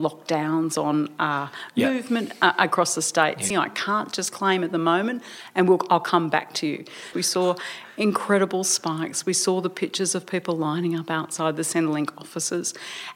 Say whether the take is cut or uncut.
cut